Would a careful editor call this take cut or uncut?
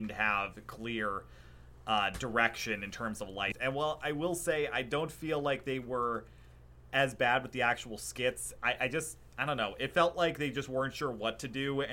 cut